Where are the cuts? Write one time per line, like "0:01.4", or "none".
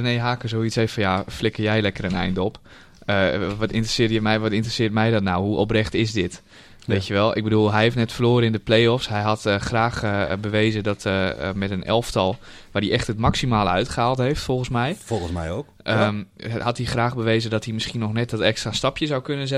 none